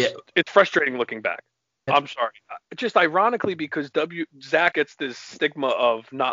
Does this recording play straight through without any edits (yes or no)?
no